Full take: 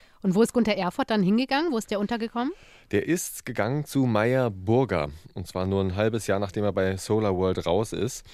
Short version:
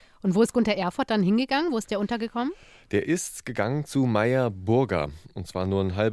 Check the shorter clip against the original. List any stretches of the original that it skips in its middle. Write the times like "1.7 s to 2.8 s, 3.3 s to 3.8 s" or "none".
none